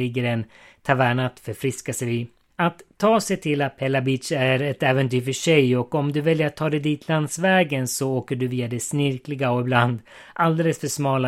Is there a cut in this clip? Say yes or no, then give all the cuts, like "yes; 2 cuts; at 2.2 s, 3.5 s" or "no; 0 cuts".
yes; 1 cut; at 2.5 s